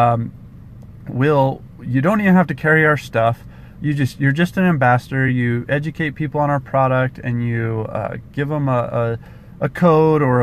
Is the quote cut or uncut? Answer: uncut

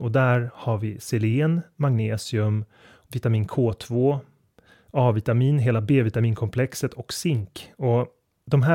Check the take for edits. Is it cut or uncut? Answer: cut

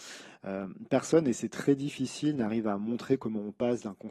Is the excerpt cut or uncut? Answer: uncut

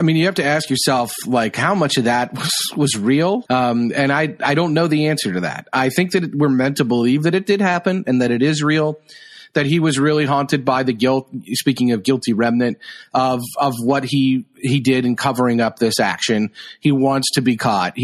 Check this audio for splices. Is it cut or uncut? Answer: cut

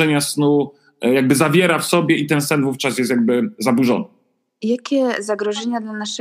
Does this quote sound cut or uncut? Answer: uncut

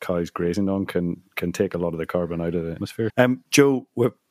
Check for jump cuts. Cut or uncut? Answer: cut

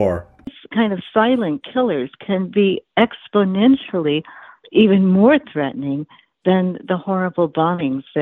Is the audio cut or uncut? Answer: uncut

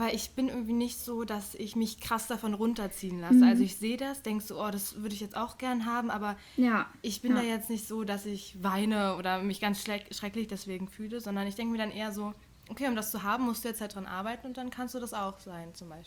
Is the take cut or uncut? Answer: uncut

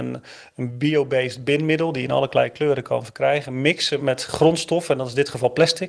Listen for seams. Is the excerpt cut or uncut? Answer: cut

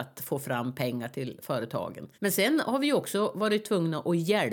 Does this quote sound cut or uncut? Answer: cut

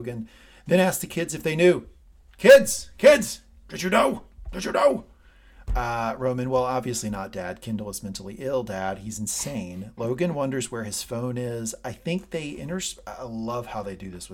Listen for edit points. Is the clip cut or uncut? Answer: uncut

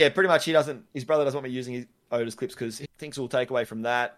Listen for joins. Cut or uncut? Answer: cut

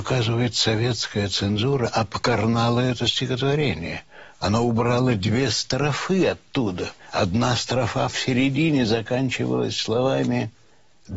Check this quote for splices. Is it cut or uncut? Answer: uncut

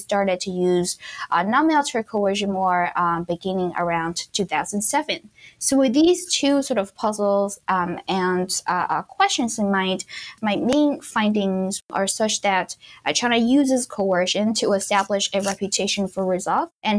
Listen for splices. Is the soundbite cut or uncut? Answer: uncut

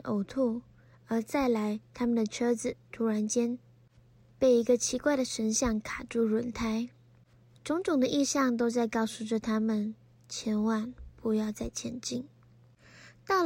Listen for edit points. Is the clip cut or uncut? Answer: uncut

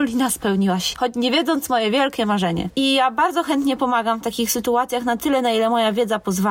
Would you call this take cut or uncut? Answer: cut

